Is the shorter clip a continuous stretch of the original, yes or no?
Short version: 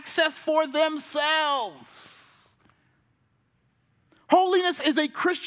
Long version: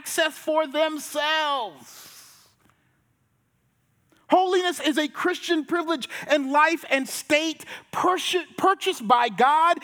yes